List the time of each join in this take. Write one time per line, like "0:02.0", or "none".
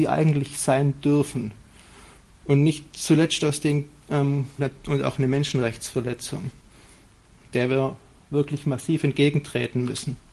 0:04.6